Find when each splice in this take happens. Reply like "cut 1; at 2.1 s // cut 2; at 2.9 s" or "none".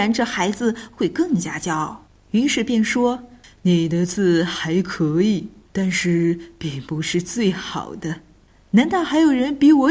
none